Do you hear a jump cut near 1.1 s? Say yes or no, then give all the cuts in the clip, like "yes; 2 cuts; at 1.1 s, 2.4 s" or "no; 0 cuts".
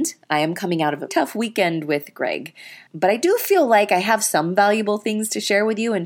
yes; 2 cuts; at 1.1 s, 2.9 s